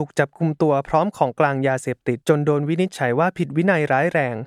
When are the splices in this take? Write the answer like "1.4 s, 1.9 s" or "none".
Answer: 2.2 s